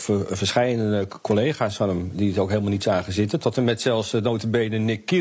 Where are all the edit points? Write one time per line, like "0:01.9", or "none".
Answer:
none

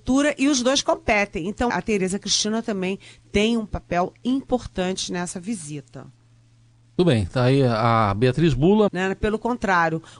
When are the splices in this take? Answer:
0:01.7
0:08.9

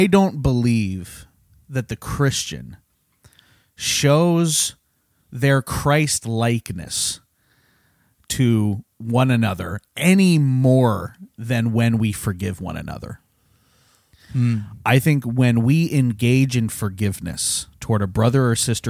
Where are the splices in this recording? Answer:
0:08.9

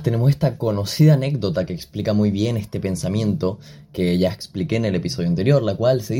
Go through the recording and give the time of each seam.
none

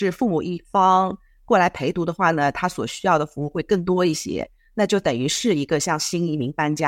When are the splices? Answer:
none

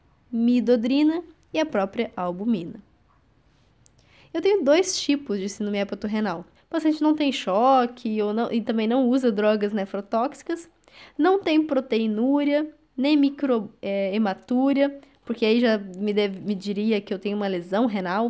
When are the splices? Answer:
0:06.5

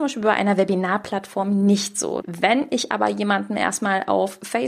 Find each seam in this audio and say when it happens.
0:02.2

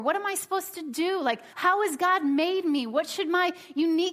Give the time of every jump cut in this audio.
0:01.5

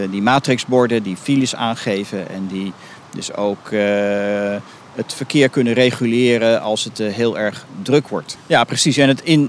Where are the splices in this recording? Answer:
0:08.3

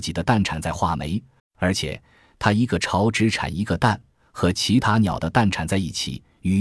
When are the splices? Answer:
0:01.4

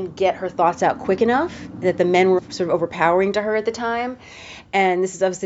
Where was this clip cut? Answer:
0:02.4

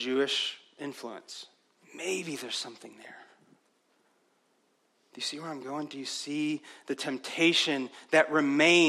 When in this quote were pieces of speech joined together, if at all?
0:01.8

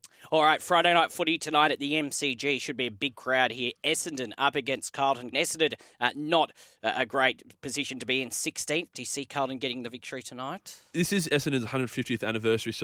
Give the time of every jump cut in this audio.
0:05.3
0:10.9

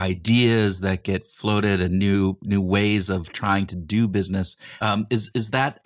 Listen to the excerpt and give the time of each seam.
0:04.8

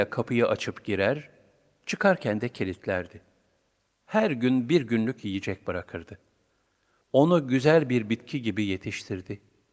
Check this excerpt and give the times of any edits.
0:07.0

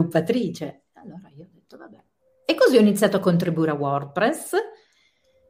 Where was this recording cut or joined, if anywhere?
none

